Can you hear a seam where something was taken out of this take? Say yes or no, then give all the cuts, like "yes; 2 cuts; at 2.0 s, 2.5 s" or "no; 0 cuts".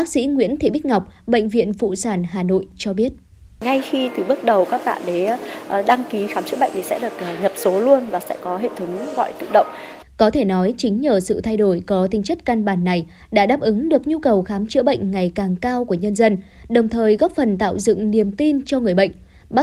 yes; 1 cut; at 10.0 s